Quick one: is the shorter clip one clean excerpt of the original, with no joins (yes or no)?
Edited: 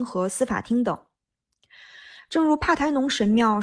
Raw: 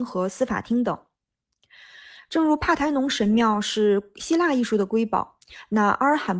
yes